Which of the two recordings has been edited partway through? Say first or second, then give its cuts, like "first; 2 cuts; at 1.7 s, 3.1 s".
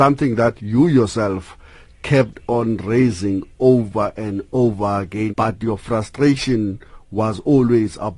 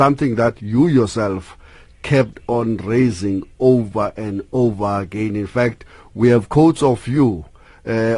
first; 1 cut; at 5.3 s